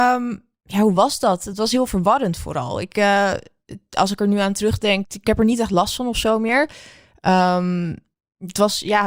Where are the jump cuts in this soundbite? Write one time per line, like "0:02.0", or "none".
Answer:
0:05.0